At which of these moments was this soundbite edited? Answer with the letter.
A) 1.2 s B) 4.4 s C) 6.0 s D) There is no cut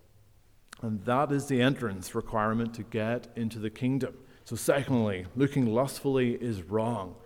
B